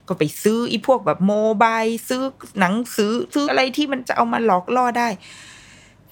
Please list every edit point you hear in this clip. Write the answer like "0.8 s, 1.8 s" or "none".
3.5 s